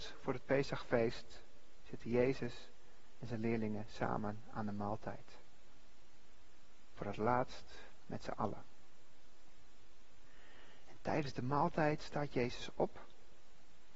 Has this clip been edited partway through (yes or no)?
no